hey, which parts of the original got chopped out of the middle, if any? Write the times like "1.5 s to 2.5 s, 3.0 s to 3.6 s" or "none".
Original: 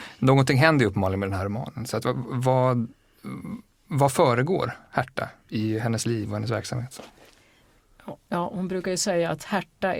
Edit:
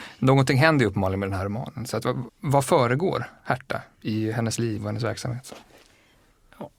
2.3 s to 3.7 s